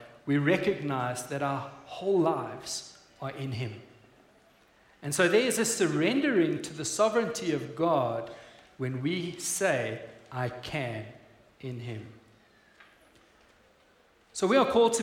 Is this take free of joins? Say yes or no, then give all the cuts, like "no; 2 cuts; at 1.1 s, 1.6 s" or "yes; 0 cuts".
yes; 0 cuts